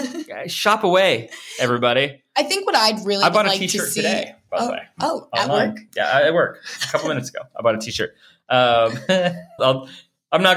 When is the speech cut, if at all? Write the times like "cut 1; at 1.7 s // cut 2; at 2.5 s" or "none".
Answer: cut 1; at 9.6 s